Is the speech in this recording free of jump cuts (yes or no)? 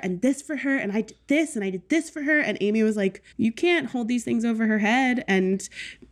no